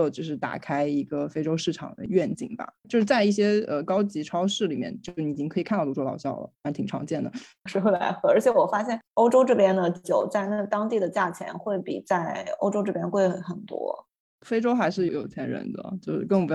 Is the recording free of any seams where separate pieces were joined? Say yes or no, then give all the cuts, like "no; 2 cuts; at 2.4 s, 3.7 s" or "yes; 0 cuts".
no; 2 cuts; at 7.7 s, 15.1 s